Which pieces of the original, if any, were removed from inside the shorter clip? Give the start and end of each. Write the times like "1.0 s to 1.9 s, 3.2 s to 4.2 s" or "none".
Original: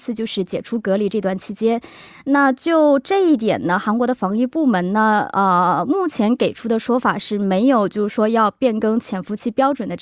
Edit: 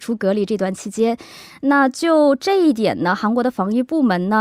none